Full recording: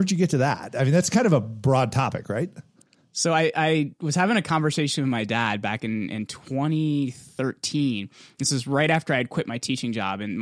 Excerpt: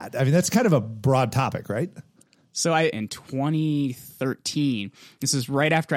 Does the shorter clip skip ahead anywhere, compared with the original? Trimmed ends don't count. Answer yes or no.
yes